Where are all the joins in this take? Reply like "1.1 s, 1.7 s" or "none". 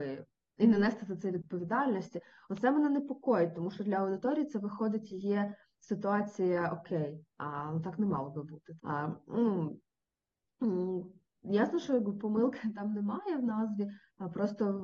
8.8 s